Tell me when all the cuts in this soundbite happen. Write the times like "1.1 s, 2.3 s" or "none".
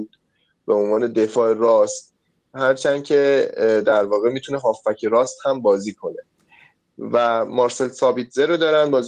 none